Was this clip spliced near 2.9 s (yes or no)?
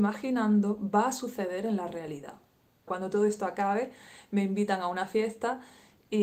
yes